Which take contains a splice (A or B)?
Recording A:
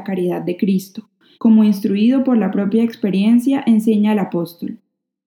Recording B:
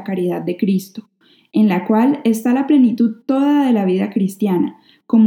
A